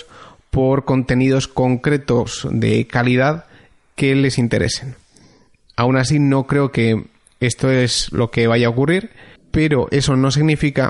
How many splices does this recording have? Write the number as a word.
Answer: one